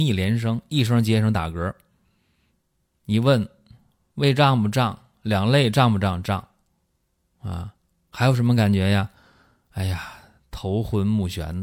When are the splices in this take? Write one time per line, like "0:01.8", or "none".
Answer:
none